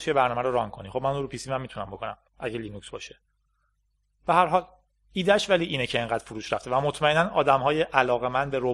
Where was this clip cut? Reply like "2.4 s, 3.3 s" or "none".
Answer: 2.3 s